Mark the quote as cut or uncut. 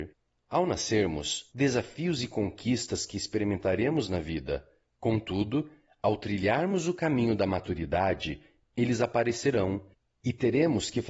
cut